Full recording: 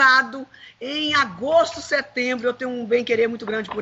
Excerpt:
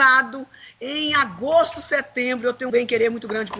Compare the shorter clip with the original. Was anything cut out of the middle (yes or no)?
yes